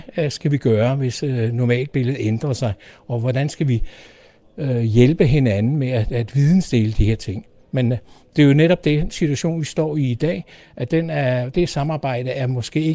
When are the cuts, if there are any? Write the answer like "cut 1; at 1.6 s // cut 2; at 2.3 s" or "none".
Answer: cut 1; at 11.5 s